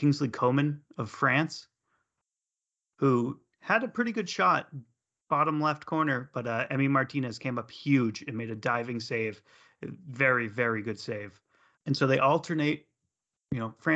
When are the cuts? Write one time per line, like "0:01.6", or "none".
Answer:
0:11.7